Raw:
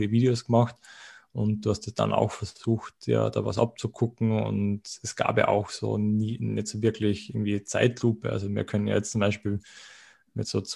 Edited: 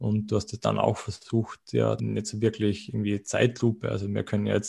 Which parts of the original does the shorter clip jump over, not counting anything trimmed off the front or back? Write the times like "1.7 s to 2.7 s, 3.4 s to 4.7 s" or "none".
3.3 s to 6.4 s